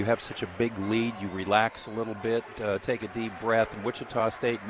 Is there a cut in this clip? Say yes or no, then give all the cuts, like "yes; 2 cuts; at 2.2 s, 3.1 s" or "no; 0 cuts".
no; 0 cuts